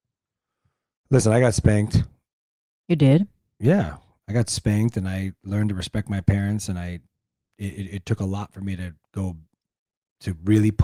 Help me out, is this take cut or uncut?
uncut